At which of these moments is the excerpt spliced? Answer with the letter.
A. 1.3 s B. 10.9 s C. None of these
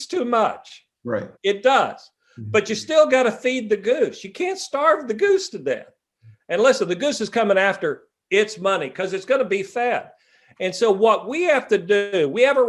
A